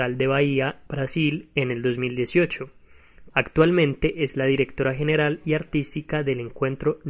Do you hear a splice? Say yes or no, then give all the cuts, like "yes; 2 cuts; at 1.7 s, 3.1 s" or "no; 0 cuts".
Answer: yes; 1 cut; at 3.3 s